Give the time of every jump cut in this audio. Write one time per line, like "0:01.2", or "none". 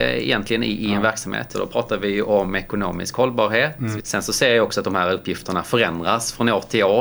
0:01.5
0:04.0